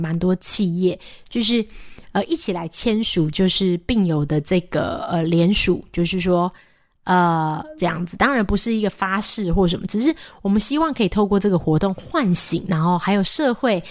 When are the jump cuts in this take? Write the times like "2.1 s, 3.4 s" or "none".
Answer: 7.8 s, 12.7 s